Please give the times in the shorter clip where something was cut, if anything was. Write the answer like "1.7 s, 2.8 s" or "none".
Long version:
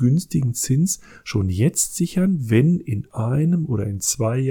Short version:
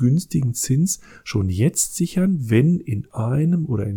none